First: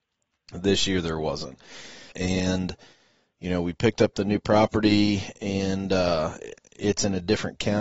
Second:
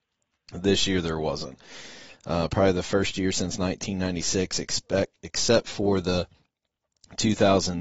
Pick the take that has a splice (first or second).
first